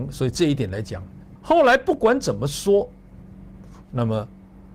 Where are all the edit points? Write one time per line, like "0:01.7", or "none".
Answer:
0:01.4
0:03.8